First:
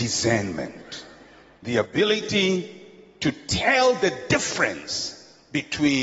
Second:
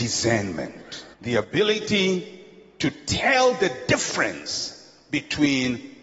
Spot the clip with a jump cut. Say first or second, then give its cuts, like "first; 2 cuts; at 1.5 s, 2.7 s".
second; 1 cut; at 1.1 s